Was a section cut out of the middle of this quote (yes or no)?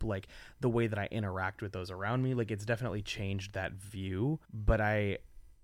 yes